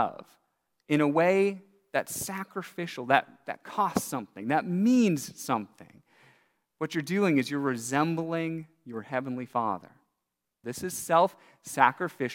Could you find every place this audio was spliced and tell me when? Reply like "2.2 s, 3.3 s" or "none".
10.6 s